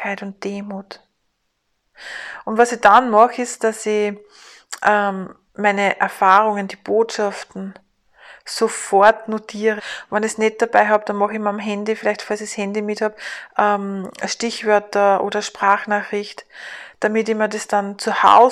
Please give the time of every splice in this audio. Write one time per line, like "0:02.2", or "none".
0:09.8